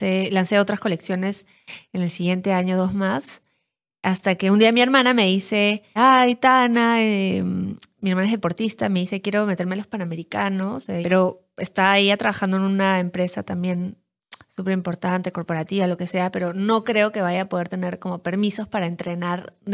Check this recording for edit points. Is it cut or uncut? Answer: cut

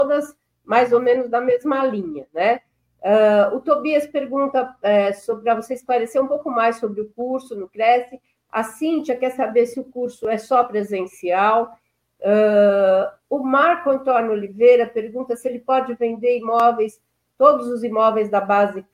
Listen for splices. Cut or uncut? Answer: uncut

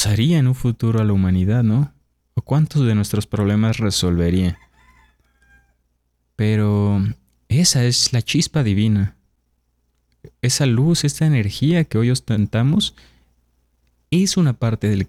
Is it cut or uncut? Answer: uncut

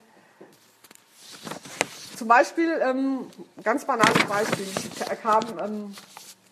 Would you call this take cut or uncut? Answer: uncut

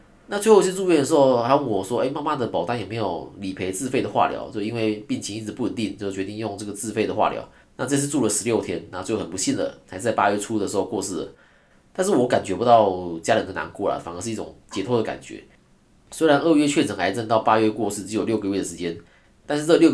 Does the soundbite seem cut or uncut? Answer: cut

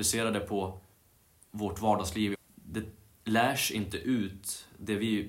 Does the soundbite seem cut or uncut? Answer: cut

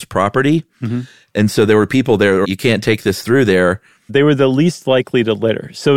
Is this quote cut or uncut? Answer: cut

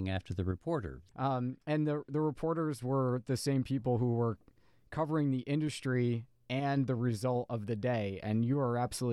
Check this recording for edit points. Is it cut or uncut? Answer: cut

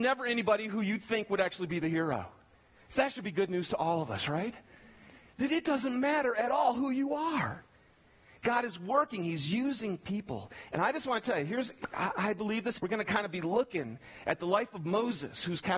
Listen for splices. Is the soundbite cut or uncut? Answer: cut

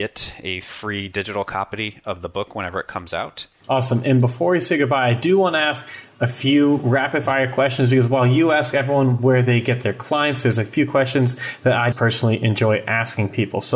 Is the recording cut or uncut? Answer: cut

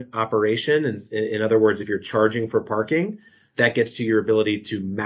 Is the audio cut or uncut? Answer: uncut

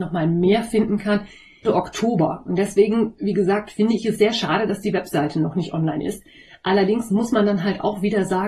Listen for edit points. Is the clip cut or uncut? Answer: cut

